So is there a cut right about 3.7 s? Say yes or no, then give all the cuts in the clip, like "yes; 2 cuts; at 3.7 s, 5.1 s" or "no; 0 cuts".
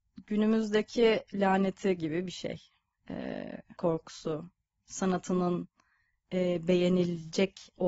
yes; 1 cut; at 3.7 s